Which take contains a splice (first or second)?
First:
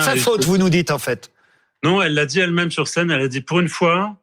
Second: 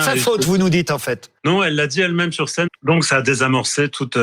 second